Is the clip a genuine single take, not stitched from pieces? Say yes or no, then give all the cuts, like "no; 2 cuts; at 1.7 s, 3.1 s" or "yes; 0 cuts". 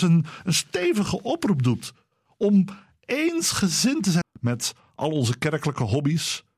no; 1 cut; at 4.2 s